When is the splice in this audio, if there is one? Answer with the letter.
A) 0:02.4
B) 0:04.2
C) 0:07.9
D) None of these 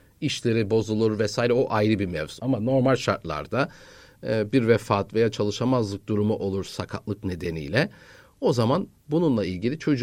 A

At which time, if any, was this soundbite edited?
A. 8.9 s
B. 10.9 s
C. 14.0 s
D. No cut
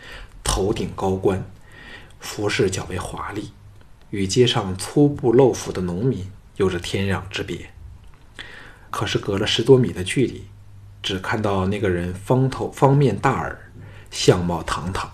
A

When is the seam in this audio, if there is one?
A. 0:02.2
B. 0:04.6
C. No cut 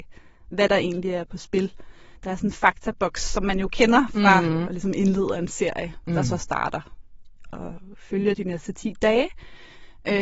B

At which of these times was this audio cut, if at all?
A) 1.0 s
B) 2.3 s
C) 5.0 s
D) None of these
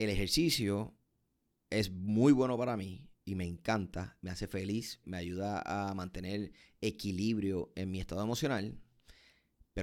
C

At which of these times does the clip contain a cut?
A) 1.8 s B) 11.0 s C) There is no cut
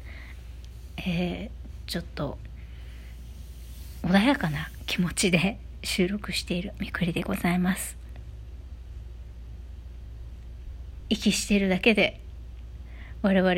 C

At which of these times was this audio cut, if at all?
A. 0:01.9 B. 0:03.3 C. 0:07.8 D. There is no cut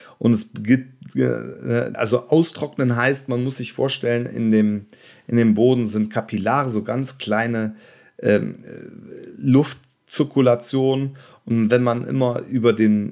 A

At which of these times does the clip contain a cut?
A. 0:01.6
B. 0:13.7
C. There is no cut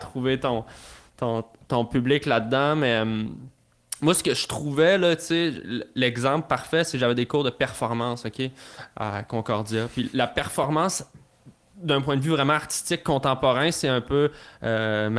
C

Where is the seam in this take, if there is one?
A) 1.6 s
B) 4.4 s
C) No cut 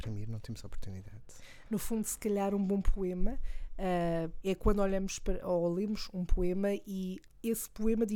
B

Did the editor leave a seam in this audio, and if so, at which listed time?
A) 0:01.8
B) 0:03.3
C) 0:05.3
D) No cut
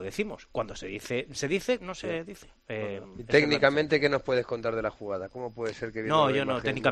A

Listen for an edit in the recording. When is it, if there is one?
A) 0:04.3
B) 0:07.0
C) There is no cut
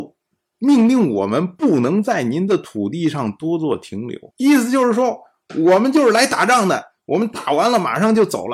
A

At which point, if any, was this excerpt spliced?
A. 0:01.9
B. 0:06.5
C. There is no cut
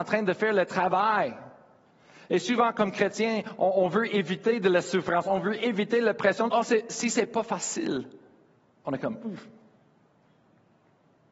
B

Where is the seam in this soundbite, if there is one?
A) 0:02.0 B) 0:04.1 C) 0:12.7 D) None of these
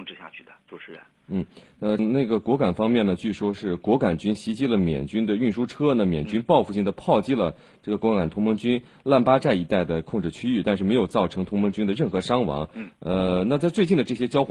A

